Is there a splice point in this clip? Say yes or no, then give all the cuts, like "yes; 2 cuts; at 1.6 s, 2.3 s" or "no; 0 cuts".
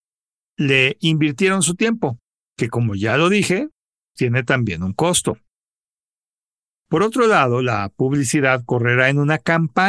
yes; 1 cut; at 4.2 s